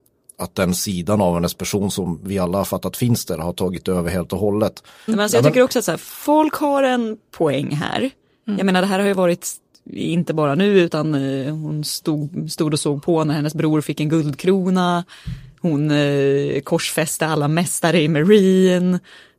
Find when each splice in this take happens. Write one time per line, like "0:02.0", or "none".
0:05.1